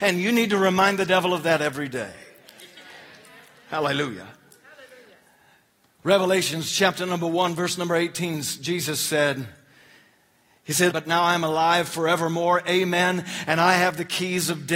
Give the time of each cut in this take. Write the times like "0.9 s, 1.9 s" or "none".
10.9 s